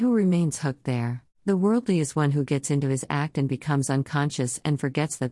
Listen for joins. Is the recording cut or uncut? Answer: cut